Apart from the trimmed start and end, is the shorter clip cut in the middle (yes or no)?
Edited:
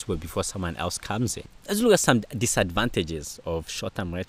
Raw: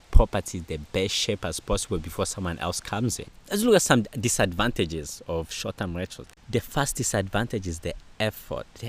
no